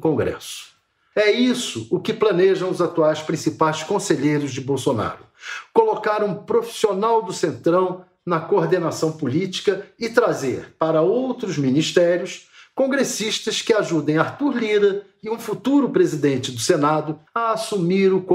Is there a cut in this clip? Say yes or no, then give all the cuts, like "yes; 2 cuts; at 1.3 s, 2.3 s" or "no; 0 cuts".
yes; 2 cuts; at 1.1 s, 17.3 s